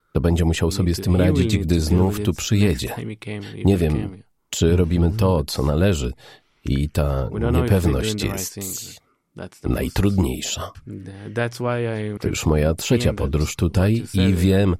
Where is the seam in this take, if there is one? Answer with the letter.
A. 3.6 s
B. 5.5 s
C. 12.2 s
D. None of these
C